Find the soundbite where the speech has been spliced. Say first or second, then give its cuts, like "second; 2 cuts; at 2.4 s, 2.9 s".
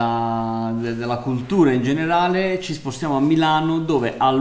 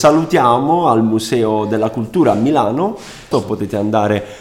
second; 1 cut; at 3.3 s